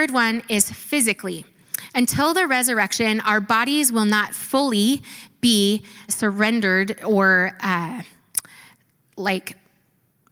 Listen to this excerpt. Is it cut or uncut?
cut